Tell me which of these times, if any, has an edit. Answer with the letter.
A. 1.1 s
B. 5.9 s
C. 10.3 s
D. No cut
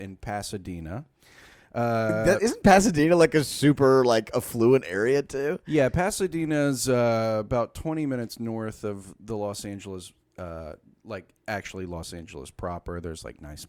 D